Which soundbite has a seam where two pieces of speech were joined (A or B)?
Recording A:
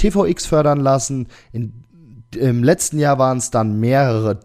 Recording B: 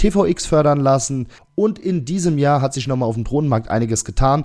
B